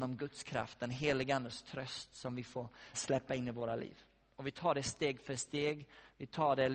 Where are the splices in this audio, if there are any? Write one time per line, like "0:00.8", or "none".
0:02.9